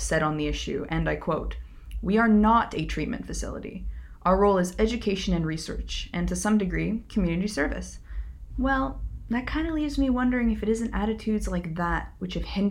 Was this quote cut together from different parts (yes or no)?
yes